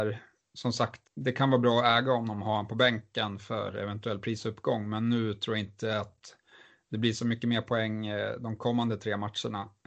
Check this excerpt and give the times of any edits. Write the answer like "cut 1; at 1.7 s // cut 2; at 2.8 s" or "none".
cut 1; at 1.0 s